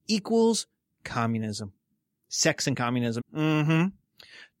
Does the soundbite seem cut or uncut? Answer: cut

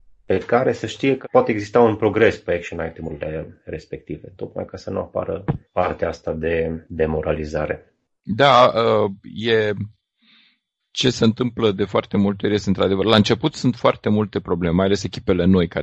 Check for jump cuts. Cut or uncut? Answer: uncut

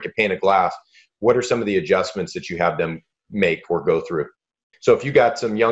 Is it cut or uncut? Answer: cut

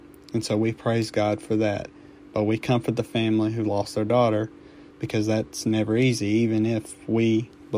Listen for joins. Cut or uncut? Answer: cut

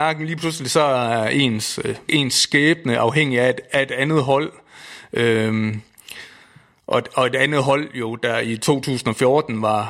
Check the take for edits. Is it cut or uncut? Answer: uncut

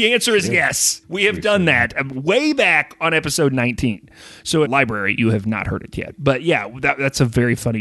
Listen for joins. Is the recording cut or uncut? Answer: cut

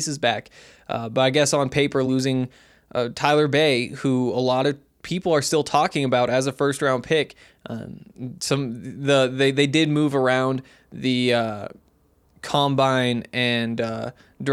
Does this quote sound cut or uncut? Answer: uncut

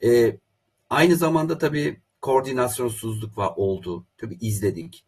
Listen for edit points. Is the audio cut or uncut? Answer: uncut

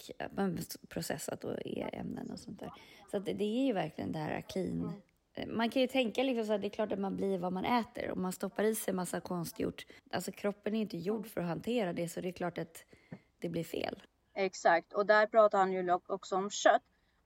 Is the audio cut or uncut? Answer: cut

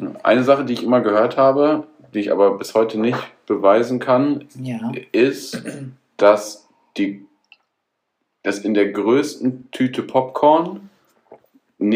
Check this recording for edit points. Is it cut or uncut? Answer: uncut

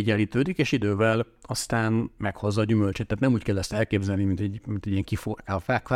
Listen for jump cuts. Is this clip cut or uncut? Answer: uncut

